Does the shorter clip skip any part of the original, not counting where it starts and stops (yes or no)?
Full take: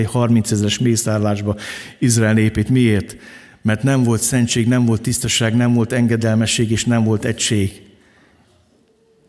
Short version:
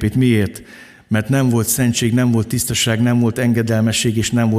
no